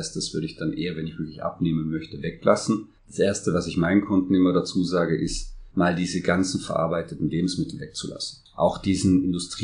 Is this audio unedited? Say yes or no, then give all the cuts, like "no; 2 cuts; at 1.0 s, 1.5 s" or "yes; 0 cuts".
no; 1 cut; at 3.0 s